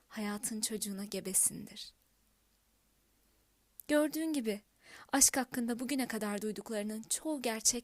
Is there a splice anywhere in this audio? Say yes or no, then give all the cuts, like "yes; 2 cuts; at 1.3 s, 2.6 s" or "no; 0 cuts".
no; 0 cuts